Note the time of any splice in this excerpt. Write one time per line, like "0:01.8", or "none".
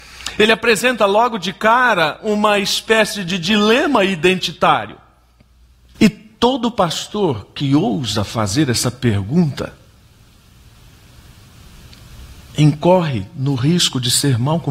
0:06.0

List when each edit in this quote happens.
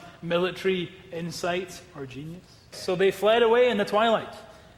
0:02.7

